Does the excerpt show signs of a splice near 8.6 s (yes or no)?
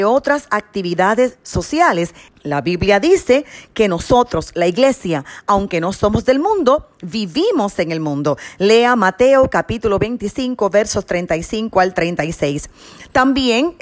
no